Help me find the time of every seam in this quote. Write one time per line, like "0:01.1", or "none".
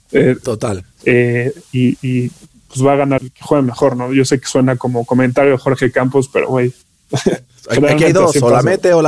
0:00.9
0:03.2